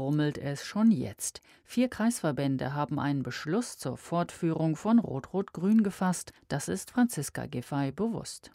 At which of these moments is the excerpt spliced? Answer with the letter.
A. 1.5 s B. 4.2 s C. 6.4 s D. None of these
C